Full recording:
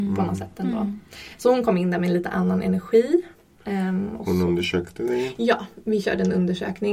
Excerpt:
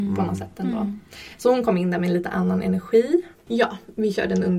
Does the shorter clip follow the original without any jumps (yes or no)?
no